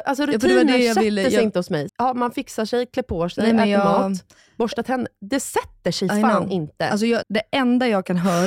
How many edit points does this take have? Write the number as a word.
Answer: two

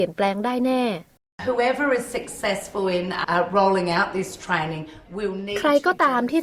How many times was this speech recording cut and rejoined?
one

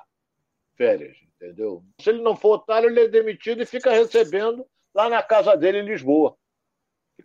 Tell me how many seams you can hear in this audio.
one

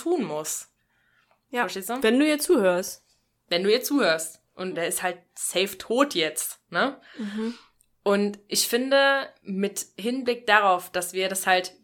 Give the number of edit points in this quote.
one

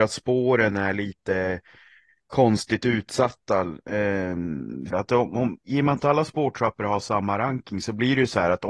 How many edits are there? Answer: one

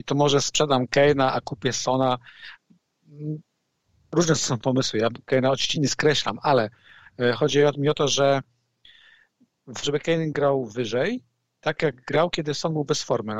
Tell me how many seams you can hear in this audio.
two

